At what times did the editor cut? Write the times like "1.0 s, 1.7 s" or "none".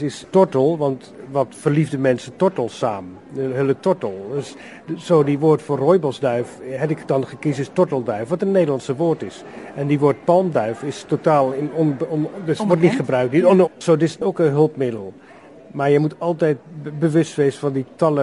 13.6 s

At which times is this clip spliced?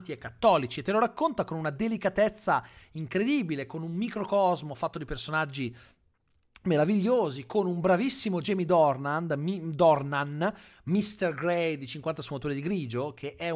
none

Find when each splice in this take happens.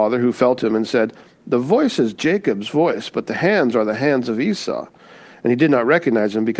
none

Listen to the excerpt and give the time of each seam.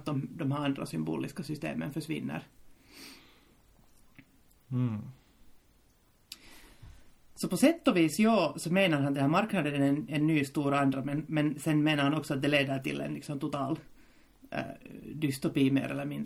none

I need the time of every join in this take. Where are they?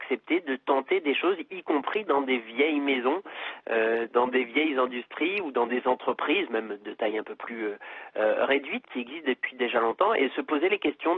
8.8 s

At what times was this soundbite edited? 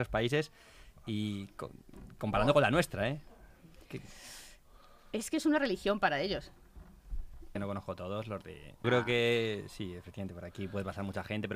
7.6 s, 8.8 s

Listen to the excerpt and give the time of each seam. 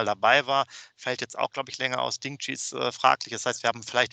none

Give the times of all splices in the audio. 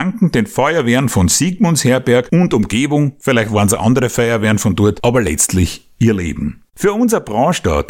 3.2 s

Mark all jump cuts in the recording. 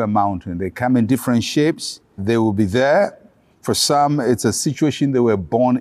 2.2 s, 3.5 s

